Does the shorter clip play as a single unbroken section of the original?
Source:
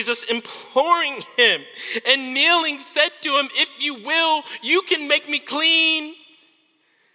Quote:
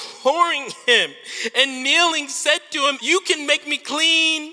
no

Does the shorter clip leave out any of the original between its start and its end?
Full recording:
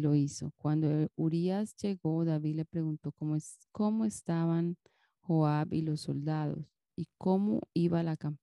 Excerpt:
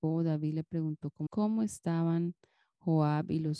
yes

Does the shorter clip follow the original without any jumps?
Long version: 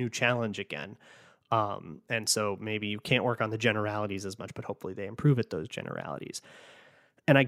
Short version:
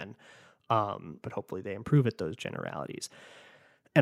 no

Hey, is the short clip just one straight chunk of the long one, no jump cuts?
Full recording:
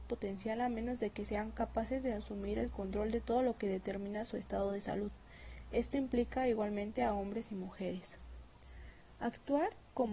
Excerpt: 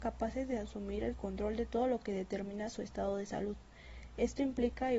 yes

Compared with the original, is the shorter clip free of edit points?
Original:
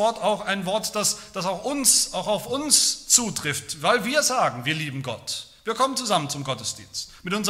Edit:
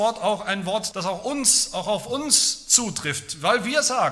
no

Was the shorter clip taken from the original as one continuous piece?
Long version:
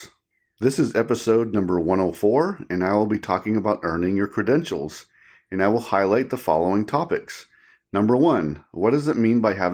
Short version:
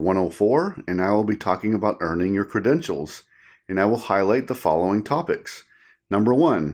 yes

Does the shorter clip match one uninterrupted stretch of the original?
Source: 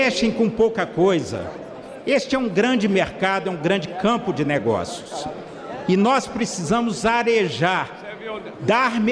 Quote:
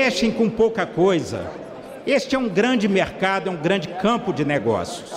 yes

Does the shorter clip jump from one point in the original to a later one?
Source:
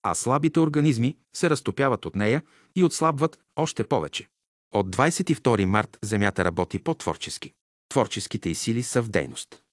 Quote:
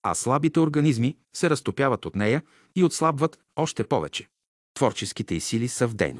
yes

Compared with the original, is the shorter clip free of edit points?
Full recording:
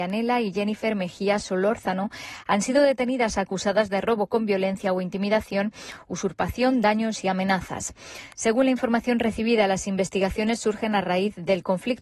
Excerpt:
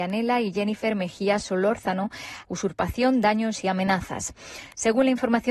no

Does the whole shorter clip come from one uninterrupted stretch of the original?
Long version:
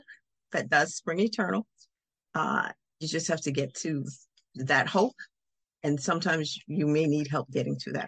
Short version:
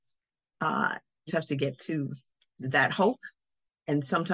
no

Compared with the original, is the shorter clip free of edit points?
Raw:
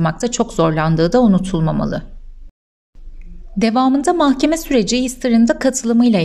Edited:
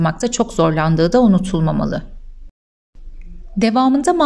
yes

